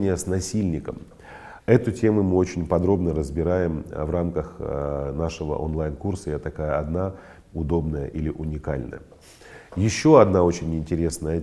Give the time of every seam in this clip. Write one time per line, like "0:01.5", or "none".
0:01.6